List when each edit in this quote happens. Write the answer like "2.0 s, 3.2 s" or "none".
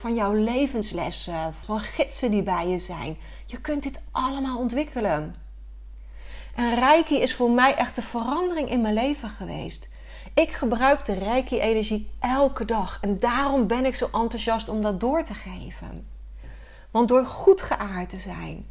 1.6 s